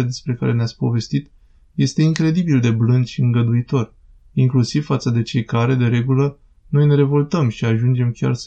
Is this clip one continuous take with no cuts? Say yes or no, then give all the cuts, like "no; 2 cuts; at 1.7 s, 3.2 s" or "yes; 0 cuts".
yes; 0 cuts